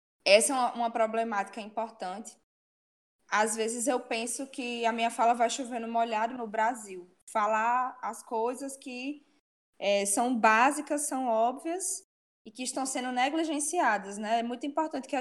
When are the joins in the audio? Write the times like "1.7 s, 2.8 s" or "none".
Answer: 6.4 s

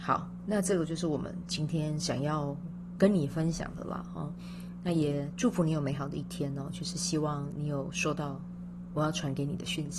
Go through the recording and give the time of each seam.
none

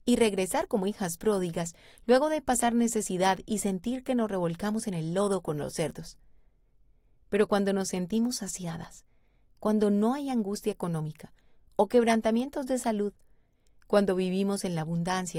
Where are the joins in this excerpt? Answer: none

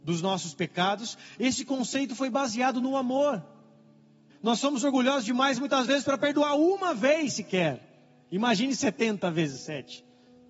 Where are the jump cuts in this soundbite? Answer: 4.3 s

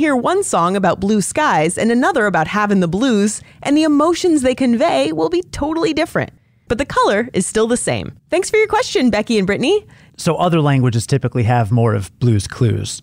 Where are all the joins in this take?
8.2 s, 10.1 s

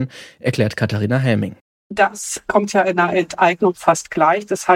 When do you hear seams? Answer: none

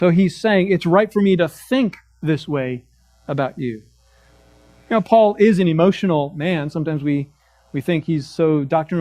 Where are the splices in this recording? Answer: none

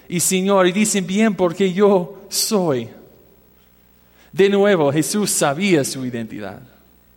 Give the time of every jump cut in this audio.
none

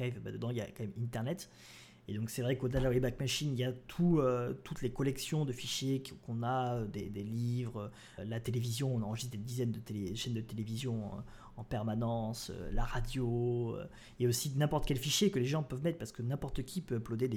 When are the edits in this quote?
8.2 s

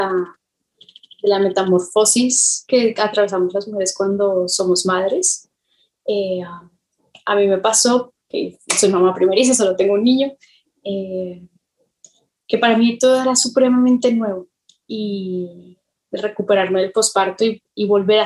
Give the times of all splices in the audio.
8.2 s, 16.1 s

